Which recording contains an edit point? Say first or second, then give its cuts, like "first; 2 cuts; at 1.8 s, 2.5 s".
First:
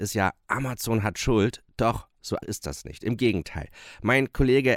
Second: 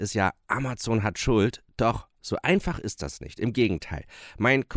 first; 1 cut; at 2.4 s